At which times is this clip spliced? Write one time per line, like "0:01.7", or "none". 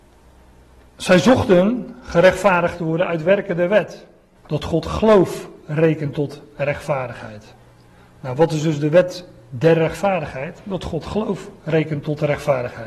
0:04.4